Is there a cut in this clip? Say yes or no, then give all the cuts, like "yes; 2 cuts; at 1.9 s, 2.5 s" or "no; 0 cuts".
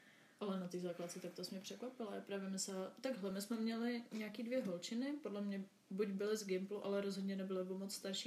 no; 0 cuts